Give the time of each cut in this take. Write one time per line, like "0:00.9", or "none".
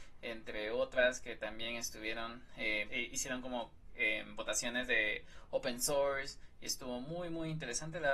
0:02.9